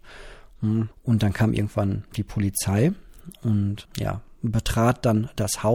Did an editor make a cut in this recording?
yes; 2 cuts; at 0.9 s, 3.9 s

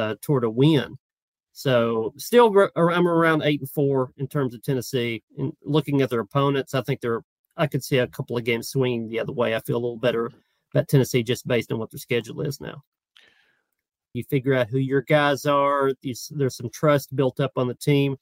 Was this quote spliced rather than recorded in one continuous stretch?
yes; 2 cuts; at 5.3 s, 14.1 s

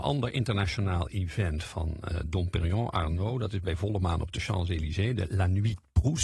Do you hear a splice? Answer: no; 0 cuts

